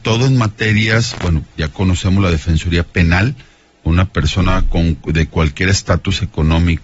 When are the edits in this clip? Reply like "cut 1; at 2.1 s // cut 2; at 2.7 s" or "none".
none